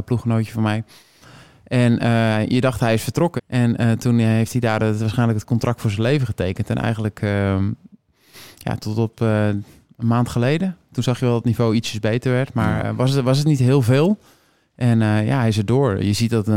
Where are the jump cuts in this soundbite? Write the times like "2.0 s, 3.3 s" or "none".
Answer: 3.4 s, 8.8 s